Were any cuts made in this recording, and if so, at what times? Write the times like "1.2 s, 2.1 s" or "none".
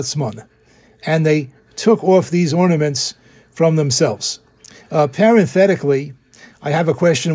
none